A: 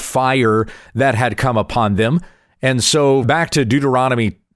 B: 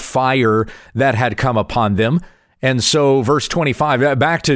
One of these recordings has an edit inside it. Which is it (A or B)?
A